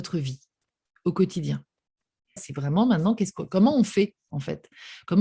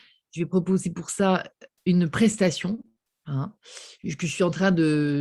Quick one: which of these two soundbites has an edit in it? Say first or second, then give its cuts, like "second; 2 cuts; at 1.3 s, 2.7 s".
first; 1 cut; at 2.4 s